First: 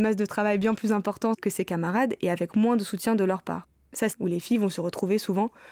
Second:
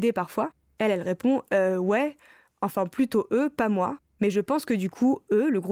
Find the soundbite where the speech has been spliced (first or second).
first